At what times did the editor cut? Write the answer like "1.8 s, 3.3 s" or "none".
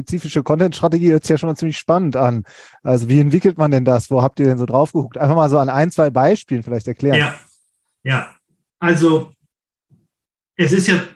none